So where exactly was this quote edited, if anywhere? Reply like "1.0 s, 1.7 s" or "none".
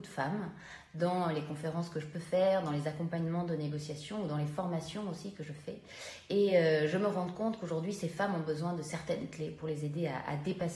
none